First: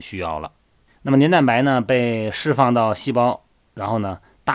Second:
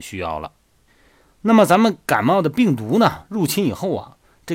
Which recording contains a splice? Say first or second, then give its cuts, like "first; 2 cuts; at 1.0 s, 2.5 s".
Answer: first; 1 cut; at 1.0 s